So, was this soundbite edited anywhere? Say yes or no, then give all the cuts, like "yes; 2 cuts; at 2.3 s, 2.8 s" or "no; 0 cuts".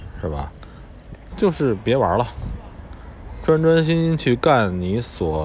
yes; 1 cut; at 1.3 s